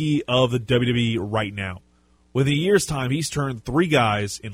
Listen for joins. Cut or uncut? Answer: uncut